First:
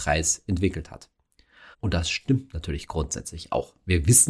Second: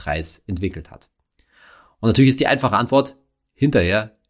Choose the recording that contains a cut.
first; 1 cut; at 1.7 s

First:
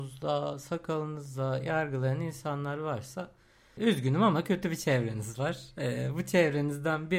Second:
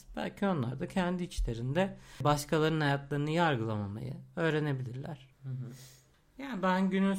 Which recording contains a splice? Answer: second; 1 cut; at 5.3 s

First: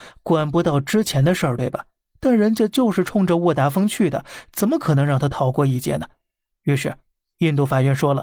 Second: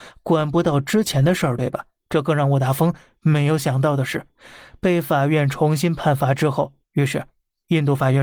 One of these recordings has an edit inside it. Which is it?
second; 2 cuts; at 2.0 s, 6.8 s

